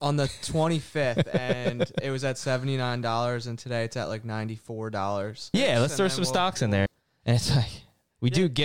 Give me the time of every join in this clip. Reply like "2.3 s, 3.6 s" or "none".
5.5 s, 6.9 s

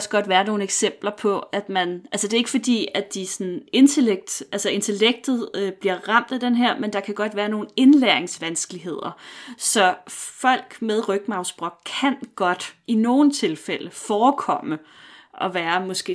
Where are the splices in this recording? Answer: none

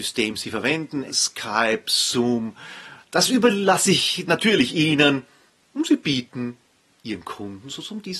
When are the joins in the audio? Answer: 1.1 s, 3.0 s

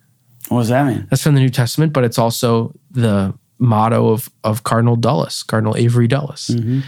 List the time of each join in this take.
none

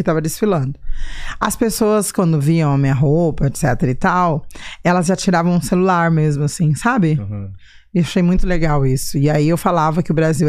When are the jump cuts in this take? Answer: none

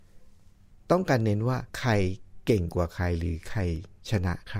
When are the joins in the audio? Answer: 1.7 s

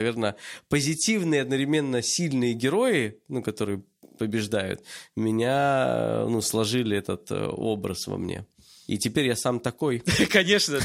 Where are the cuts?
none

